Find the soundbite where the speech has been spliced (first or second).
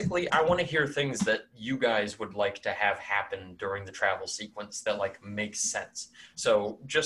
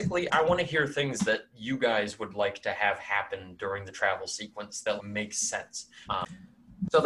second